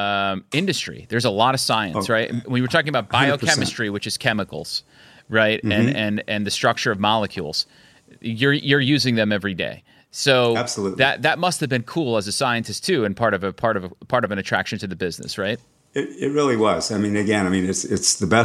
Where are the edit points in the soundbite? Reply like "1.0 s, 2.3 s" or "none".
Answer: none

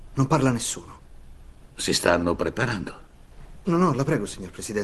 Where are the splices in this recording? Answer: 1.7 s, 3.6 s

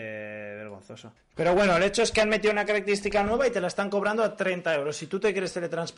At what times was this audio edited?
1.2 s

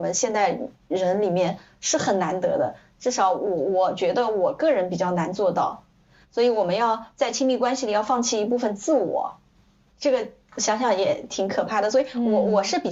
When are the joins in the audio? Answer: none

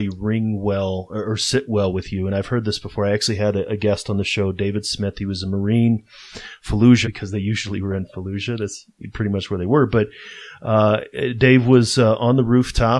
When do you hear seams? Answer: 7.0 s

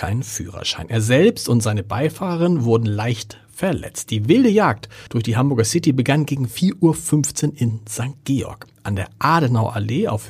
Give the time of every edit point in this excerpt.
5.1 s

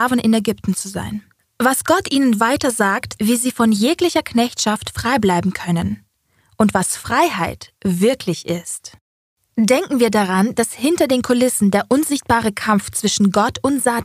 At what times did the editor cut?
3.2 s

